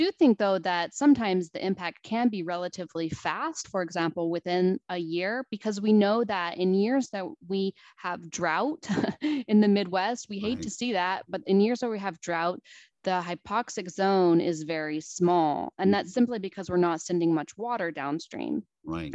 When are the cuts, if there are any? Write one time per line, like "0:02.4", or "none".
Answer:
none